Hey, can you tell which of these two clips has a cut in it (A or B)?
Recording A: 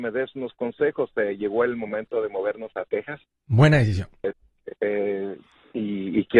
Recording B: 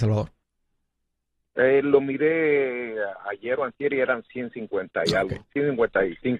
A